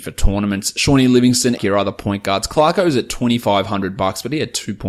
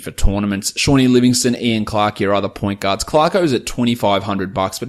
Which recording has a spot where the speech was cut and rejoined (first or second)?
first